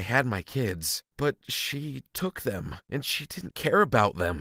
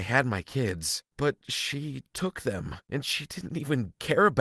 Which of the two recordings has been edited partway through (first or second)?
first